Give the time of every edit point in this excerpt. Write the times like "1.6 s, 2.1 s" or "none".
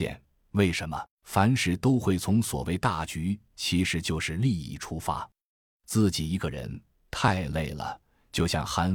1.1 s, 5.8 s